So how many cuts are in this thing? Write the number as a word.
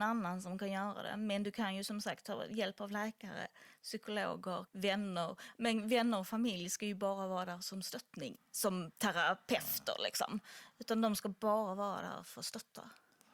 two